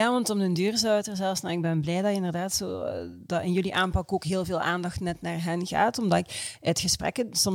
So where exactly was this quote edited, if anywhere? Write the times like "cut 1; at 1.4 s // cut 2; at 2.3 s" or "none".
cut 1; at 3.3 s